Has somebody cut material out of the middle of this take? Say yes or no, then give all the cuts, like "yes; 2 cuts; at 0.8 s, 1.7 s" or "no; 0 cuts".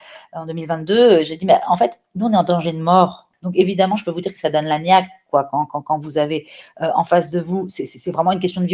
yes; 1 cut; at 3.3 s